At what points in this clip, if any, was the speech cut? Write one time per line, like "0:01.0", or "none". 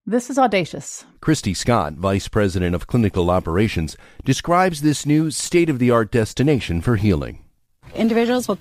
0:01.1